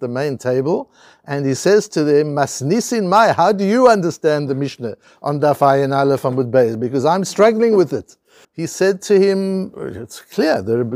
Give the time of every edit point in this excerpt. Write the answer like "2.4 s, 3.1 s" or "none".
8.4 s

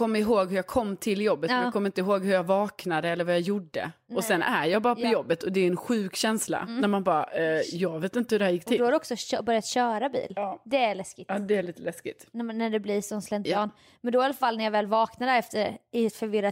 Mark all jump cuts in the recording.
none

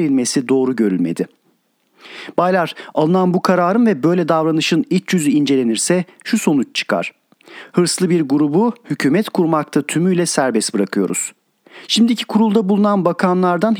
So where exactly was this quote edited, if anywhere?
none

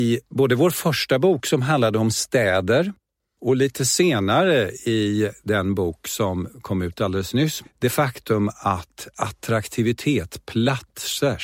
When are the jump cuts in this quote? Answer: 7.6 s

